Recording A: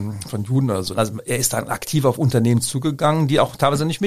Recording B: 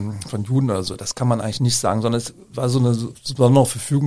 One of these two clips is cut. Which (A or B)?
A